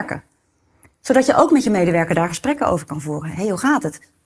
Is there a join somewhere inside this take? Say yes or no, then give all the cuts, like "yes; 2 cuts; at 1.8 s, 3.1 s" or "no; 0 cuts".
no; 0 cuts